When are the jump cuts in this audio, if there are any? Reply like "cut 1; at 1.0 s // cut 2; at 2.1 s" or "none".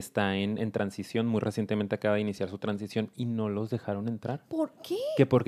none